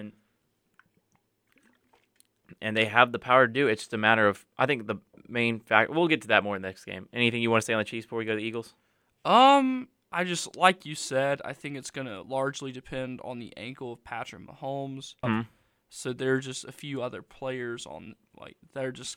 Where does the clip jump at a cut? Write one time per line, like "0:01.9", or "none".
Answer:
0:15.2